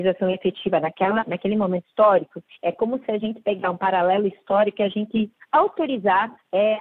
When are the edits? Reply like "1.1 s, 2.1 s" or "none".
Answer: none

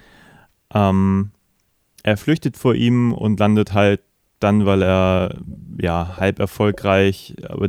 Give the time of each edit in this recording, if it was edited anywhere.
none

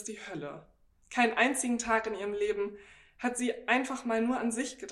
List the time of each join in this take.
1.0 s

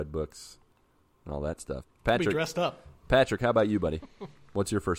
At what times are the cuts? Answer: 1.8 s

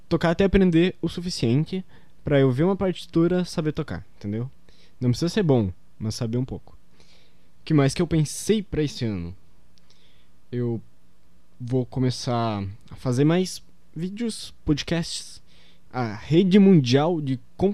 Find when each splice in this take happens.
15.9 s

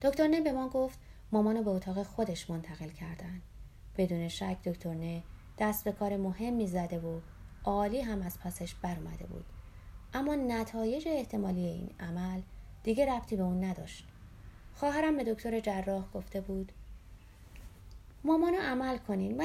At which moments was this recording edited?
3.9 s

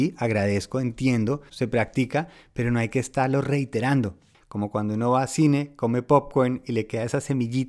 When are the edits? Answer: 1.5 s, 4.3 s

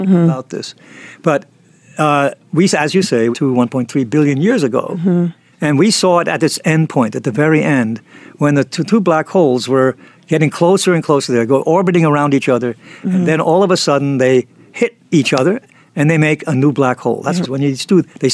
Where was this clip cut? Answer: 3.3 s, 17.4 s

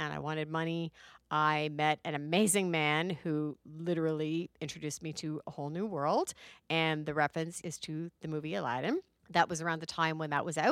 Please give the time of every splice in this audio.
7.6 s

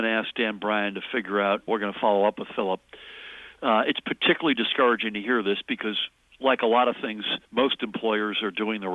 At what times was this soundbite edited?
1.7 s, 7.4 s

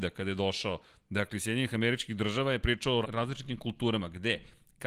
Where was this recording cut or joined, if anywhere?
3.0 s

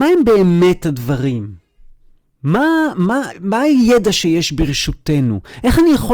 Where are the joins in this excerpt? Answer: 3.3 s

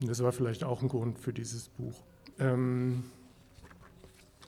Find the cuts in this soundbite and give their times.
2.3 s

